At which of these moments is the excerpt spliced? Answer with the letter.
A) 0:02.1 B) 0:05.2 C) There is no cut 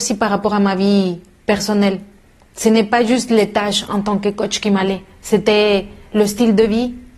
C